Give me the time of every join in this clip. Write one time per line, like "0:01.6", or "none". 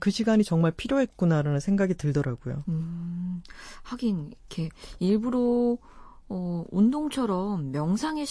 none

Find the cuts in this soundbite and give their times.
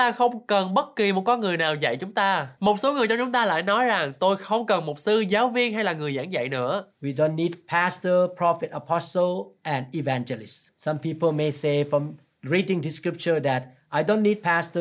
0:02.6
0:10.7

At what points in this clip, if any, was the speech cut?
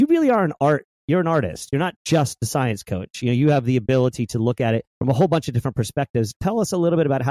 0:04.9

